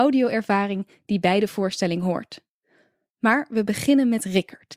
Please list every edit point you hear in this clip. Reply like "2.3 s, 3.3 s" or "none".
none